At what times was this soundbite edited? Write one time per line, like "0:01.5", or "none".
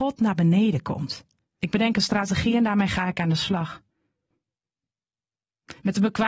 0:01.6